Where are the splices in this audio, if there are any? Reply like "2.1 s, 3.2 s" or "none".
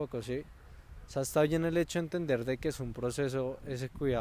none